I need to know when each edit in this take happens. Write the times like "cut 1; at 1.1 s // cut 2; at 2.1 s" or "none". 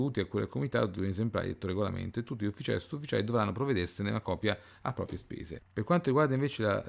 cut 1; at 5.6 s